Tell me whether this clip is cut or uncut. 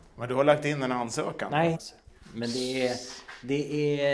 cut